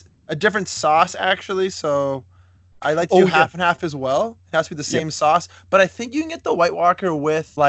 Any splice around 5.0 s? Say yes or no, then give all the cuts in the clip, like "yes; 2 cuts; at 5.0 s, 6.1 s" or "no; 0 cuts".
no; 0 cuts